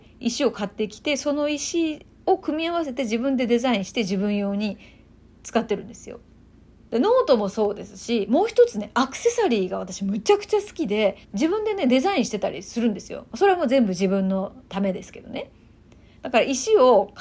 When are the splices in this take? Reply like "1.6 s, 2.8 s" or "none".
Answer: 6.9 s, 11.2 s